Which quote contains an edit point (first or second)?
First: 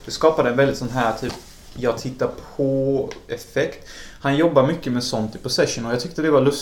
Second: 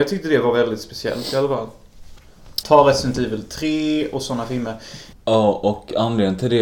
second